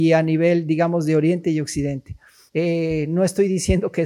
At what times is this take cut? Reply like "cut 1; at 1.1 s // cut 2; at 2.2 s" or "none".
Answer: cut 1; at 2.5 s